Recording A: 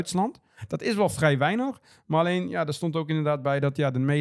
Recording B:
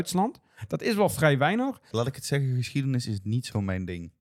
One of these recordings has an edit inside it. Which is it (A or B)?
B